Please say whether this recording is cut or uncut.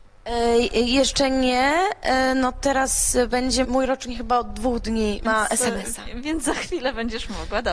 cut